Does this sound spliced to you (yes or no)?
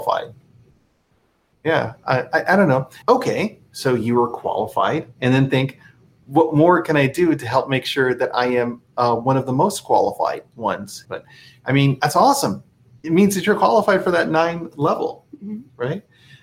yes